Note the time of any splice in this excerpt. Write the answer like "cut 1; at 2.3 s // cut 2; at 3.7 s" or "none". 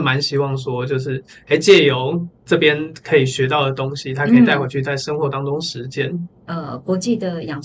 cut 1; at 6.3 s